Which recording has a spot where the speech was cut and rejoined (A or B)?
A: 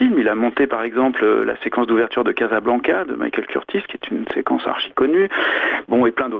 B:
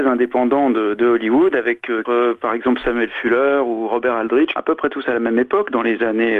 B